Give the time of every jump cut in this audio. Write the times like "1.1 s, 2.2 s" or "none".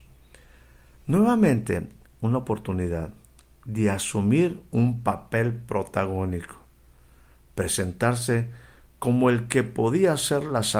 2.1 s